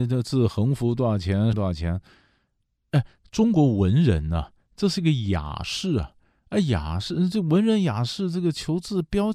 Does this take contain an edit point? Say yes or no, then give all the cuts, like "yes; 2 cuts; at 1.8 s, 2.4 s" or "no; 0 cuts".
yes; 1 cut; at 1.5 s